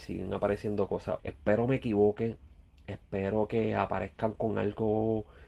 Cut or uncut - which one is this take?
cut